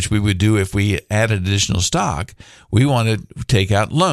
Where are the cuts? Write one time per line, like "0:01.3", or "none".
none